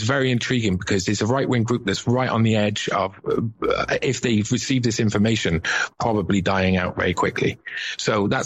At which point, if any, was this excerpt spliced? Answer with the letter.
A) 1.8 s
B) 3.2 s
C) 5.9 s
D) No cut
D